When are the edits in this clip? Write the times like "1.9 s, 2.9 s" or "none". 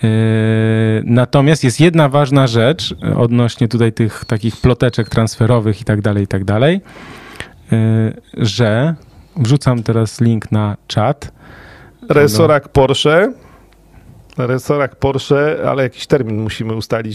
12.1 s